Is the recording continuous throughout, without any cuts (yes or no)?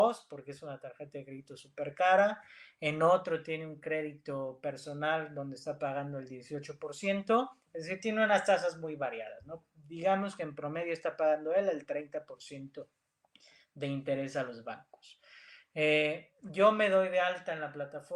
yes